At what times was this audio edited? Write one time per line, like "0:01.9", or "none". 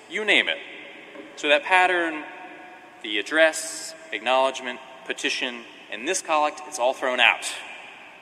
none